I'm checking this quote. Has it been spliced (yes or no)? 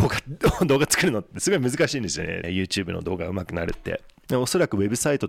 yes